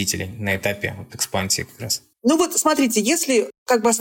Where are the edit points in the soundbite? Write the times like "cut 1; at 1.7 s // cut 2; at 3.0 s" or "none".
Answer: cut 1; at 2.1 s